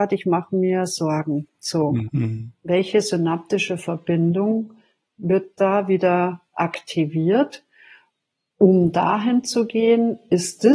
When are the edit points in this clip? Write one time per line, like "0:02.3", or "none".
0:02.1